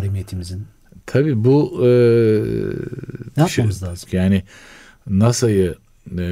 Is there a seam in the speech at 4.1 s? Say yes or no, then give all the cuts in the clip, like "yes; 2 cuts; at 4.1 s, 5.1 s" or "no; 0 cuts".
yes; 1 cut; at 4.1 s